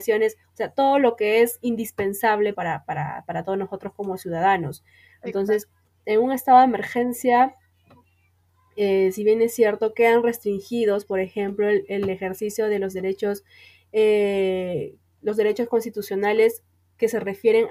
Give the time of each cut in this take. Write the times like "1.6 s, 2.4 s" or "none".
none